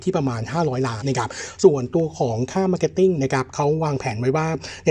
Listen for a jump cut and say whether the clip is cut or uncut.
cut